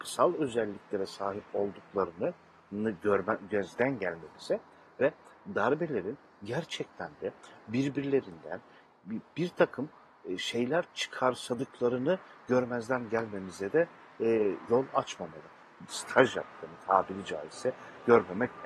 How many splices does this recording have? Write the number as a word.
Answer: two